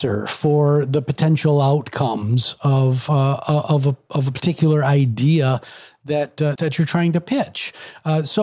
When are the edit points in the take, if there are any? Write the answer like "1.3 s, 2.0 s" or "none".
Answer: 6.6 s